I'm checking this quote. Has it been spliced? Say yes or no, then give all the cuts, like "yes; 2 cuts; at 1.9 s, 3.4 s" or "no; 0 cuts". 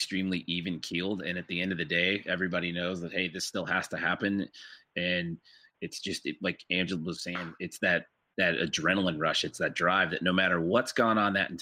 no; 0 cuts